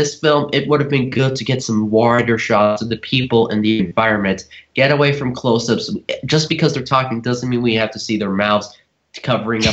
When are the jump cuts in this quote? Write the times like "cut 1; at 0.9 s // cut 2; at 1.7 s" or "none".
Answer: none